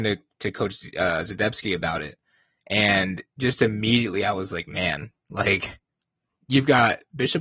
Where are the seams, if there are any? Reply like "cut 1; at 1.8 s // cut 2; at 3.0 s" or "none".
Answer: none